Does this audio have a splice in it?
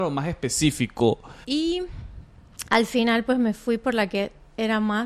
yes; 2 cuts; at 1.4 s, 2.7 s

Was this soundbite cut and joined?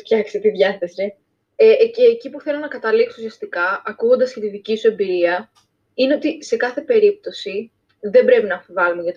yes; 1 cut; at 1.4 s

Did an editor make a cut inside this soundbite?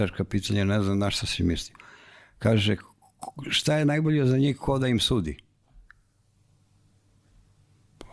no; 0 cuts

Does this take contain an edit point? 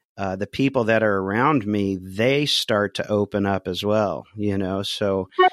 no; 0 cuts

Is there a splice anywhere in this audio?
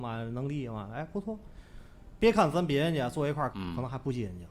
yes; 2 cuts; at 2.2 s, 3.5 s

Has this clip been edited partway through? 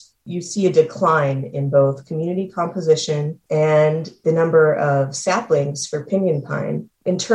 yes; 1 cut; at 3.4 s

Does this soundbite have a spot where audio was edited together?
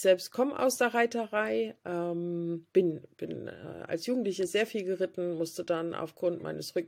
yes; 1 cut; at 2.7 s

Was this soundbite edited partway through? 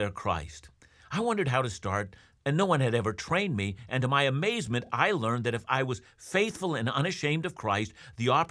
no; 0 cuts

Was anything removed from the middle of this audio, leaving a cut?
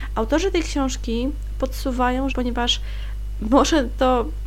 yes; 1 cut; at 2.3 s

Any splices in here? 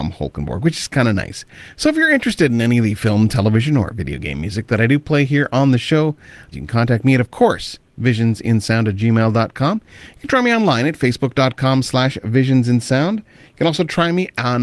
yes; 1 cut; at 6.5 s

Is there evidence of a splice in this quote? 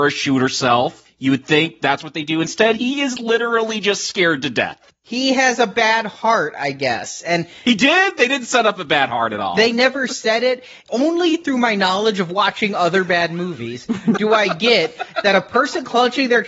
no; 0 cuts

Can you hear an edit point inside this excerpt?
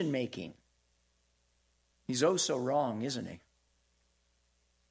yes; 1 cut; at 1.9 s

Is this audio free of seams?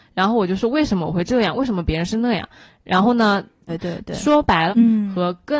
no; 2 cuts; at 3.7 s, 4.7 s

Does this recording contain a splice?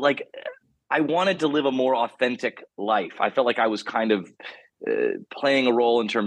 no; 0 cuts

